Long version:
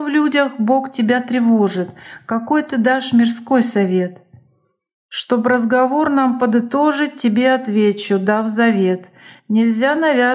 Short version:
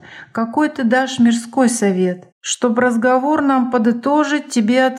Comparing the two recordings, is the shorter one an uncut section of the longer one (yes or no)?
no